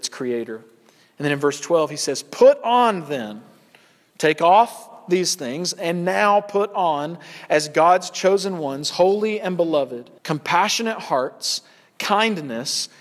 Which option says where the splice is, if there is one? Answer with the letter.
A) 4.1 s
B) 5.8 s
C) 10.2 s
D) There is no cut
C